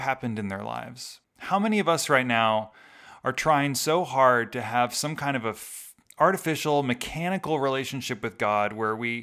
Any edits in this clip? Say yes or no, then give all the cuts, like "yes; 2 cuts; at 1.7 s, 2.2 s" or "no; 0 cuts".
yes; 1 cut; at 1.2 s